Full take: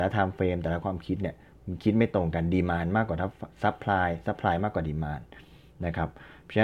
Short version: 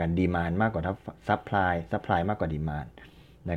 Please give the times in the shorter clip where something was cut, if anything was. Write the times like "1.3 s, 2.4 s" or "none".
none